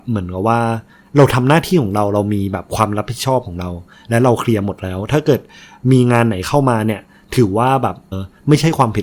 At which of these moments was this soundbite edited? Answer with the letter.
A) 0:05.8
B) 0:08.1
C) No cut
B